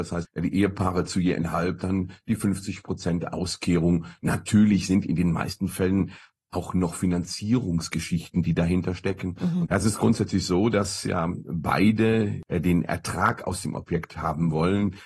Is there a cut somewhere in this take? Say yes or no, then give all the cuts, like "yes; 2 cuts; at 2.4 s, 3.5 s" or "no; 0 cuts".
yes; 1 cut; at 9.6 s